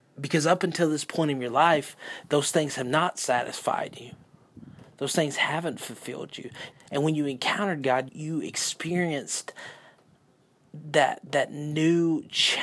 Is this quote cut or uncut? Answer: cut